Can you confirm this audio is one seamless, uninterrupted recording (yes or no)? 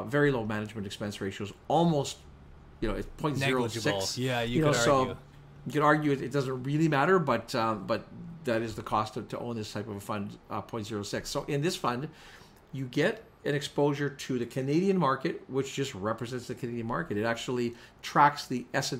yes